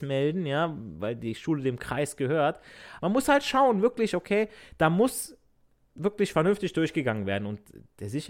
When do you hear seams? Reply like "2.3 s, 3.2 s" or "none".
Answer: 3.0 s

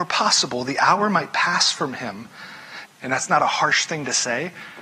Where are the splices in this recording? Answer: 2.9 s

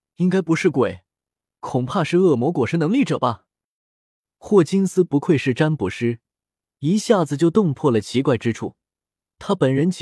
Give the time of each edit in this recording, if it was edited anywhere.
none

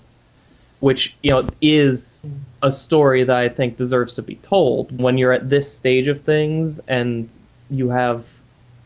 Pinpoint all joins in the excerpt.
5.0 s

